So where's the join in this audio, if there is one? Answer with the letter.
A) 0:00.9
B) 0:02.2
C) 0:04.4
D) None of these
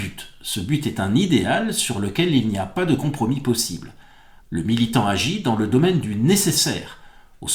C